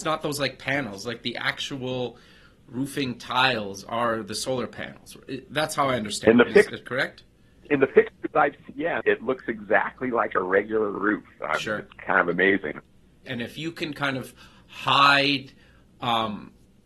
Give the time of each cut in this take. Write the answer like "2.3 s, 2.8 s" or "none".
9.0 s, 13.3 s